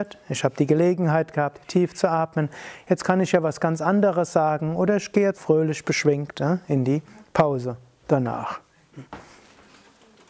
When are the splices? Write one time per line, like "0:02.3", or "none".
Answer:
0:05.4